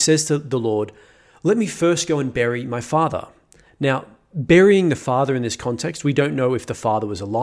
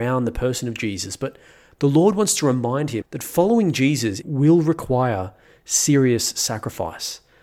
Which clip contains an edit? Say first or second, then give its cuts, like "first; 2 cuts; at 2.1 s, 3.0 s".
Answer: second; 2 cuts; at 3.0 s, 4.2 s